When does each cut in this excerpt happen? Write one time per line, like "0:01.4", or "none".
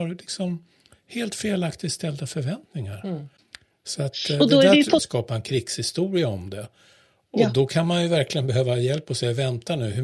0:05.0

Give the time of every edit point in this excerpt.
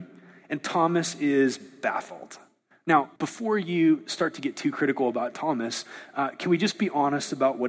0:03.2

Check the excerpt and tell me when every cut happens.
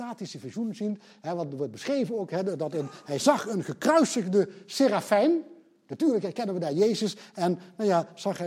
0:05.9

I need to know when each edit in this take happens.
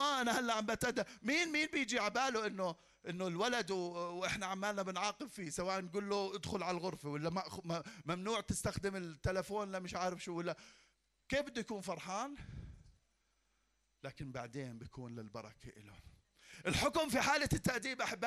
none

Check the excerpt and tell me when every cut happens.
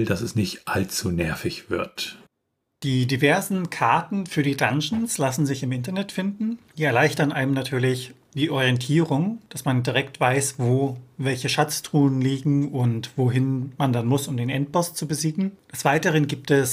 none

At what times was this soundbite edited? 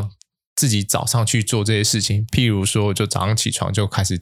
none

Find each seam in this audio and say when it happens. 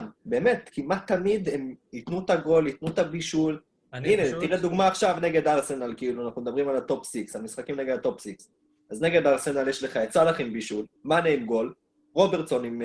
0:11.0

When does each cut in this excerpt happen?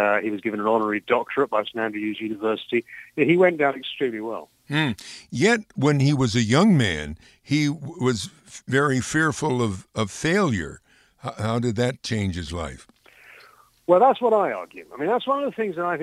none

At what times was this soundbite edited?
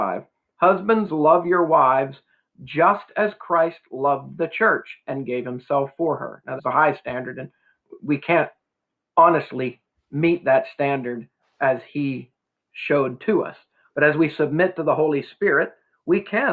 0:06.6

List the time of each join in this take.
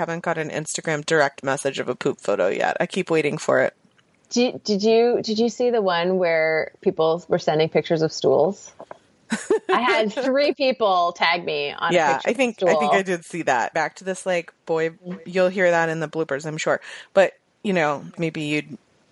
0:13.7
0:18.2

